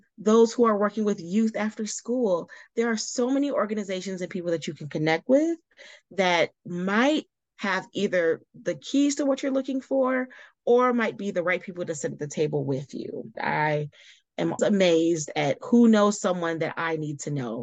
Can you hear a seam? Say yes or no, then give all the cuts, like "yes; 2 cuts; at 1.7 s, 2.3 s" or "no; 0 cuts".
yes; 2 cuts; at 13.3 s, 14.6 s